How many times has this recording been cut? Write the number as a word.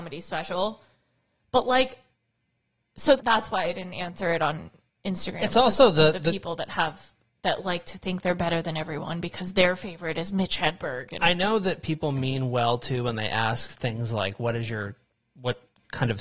one